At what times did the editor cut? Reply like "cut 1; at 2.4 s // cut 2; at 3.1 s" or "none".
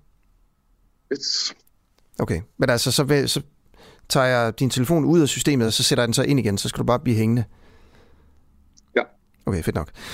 none